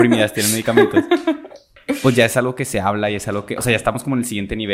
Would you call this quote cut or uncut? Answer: uncut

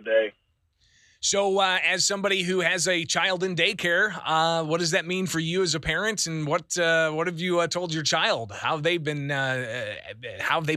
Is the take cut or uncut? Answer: uncut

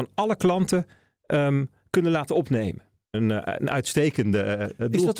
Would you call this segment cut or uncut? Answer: cut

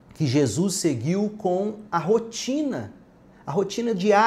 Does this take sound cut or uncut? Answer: uncut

